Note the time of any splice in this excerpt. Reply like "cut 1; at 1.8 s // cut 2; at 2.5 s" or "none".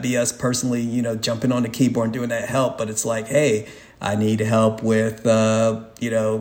none